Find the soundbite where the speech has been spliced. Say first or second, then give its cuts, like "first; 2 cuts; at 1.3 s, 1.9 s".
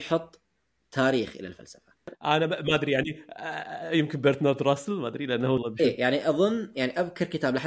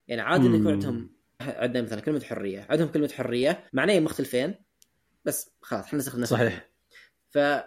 second; 2 cuts; at 1.4 s, 3.7 s